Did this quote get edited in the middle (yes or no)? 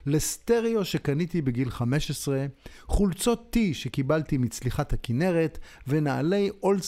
no